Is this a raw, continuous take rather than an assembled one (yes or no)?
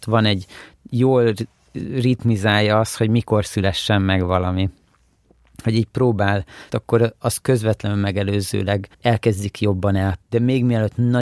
no